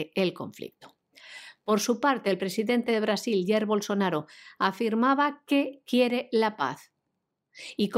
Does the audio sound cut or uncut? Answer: uncut